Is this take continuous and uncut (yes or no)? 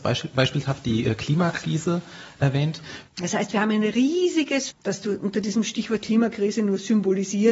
no